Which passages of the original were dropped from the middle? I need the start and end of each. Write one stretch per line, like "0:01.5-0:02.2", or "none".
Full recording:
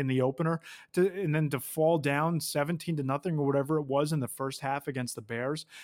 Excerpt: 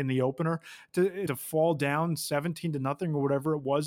0:01.3-0:01.5